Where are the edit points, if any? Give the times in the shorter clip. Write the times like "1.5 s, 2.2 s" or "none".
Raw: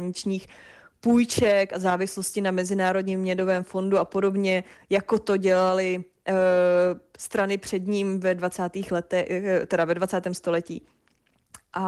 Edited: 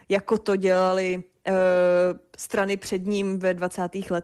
none